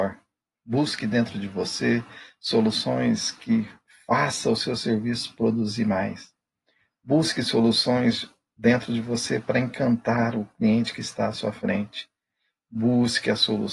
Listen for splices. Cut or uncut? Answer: uncut